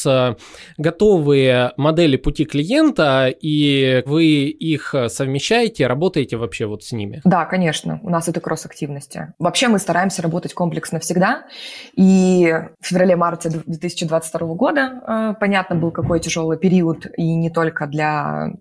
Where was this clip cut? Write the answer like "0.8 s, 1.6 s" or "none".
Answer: 4.1 s